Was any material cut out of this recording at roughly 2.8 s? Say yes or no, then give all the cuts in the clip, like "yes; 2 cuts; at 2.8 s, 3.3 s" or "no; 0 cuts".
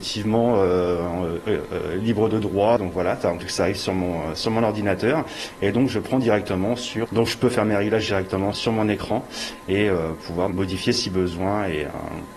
no; 2 cuts; at 7.1 s, 8.5 s